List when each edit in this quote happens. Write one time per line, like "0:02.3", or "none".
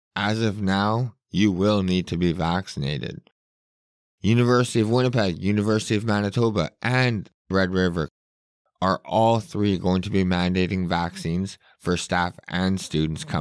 0:04.1